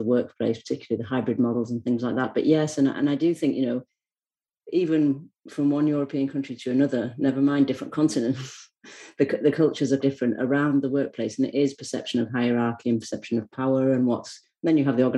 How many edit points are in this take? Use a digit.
1